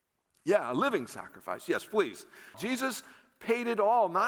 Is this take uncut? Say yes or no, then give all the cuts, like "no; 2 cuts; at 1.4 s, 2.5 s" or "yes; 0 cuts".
no; 1 cut; at 2.5 s